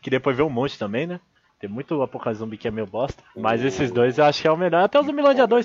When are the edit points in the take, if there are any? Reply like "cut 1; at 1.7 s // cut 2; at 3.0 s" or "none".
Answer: cut 1; at 1.5 s